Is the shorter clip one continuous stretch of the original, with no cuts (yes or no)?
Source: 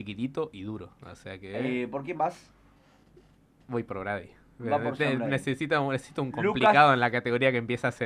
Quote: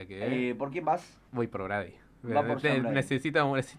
no